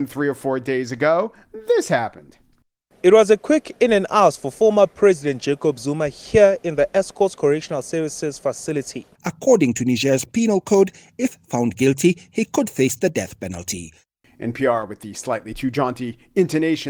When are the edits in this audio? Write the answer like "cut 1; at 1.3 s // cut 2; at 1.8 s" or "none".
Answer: cut 1; at 9.2 s

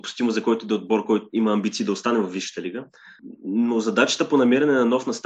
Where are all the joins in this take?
none

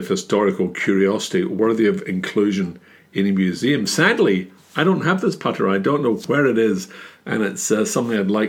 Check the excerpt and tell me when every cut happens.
none

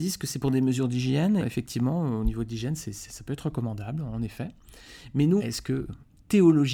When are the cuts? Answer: cut 1; at 1.4 s // cut 2; at 5.4 s

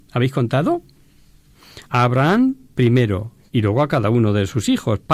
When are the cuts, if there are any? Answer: cut 1; at 1.8 s // cut 2; at 3.5 s

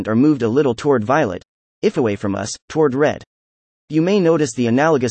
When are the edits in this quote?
none

